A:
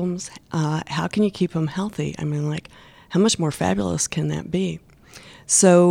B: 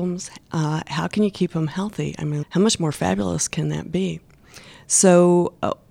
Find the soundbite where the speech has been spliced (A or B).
B